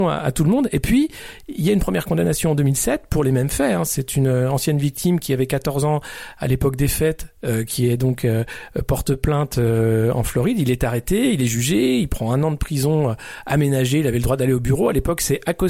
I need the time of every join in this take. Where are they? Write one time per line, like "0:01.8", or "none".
none